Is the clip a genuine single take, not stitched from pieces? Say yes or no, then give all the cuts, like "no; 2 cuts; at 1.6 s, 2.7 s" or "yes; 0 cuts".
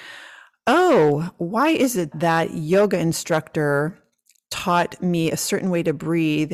no; 1 cut; at 2.1 s